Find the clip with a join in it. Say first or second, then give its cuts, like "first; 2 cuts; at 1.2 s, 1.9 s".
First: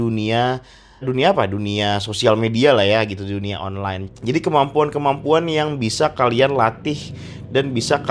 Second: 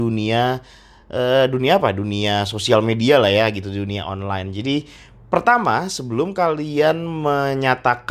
first; 2 cuts; at 1.0 s, 4.1 s